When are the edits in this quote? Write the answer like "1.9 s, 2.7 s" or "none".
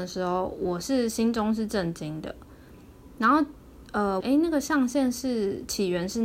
4.2 s